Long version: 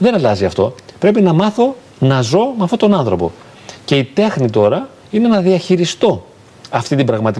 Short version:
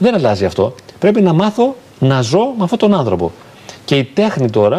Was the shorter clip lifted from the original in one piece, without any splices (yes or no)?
yes